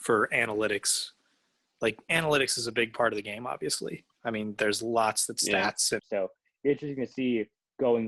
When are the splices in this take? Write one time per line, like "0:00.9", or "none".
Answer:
0:06.0